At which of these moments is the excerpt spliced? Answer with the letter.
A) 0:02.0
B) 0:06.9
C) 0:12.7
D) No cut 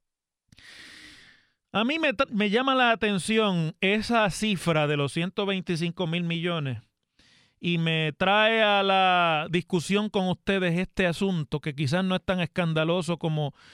D